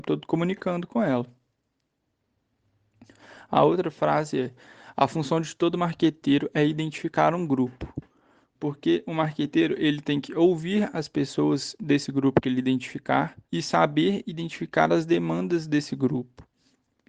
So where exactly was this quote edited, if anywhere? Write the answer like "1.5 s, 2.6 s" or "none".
8.6 s, 13.4 s